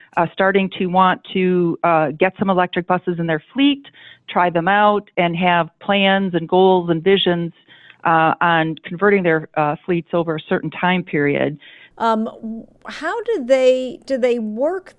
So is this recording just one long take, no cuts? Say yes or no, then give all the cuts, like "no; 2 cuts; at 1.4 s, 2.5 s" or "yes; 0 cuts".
no; 1 cut; at 11.9 s